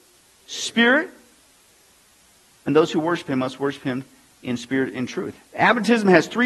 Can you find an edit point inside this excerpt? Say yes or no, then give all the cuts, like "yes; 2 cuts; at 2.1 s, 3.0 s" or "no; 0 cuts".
yes; 1 cut; at 5.3 s